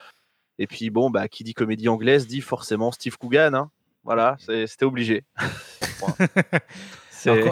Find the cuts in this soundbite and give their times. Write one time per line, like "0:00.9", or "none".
0:05.8